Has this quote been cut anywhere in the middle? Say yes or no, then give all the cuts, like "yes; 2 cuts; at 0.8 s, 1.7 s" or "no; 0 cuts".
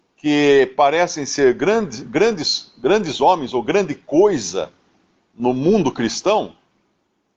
no; 0 cuts